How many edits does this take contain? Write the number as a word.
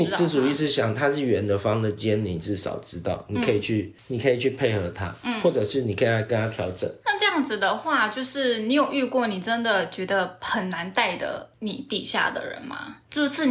one